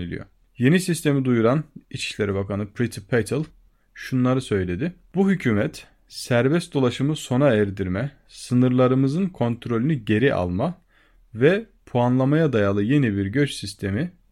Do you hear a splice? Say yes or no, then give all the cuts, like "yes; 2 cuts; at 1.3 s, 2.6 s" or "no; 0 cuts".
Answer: no; 0 cuts